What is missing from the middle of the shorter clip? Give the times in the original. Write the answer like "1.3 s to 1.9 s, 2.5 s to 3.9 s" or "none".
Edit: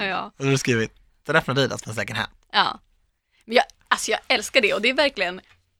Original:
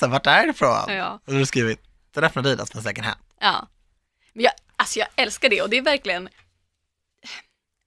none